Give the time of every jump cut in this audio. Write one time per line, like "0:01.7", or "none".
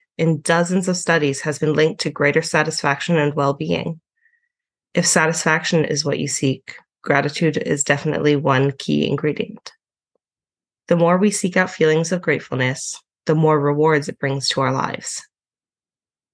none